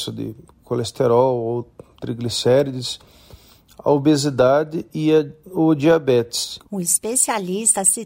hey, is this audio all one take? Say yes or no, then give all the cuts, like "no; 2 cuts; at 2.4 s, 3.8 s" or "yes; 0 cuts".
no; 1 cut; at 6.7 s